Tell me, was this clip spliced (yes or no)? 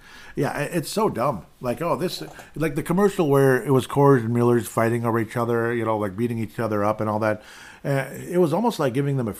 no